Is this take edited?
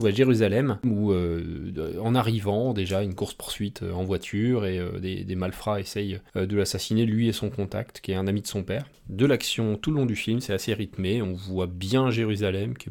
no; 0 cuts

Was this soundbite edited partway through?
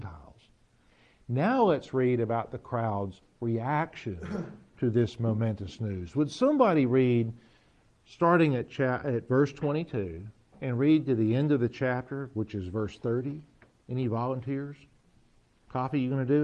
no; 0 cuts

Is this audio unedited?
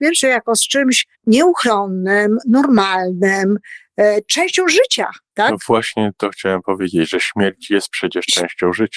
no; 1 cut; at 1.1 s

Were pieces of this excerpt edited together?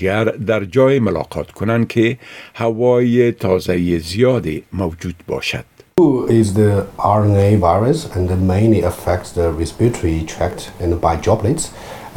no; 0 cuts

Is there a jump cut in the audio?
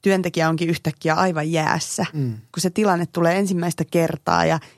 no; 0 cuts

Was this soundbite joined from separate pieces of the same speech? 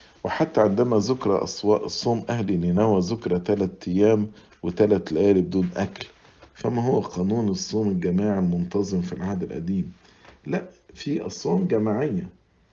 no; 0 cuts

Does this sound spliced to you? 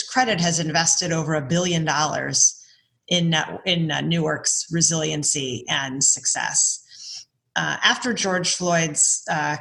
no; 0 cuts

